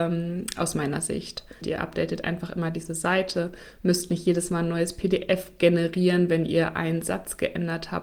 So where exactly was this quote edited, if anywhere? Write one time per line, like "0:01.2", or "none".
0:01.6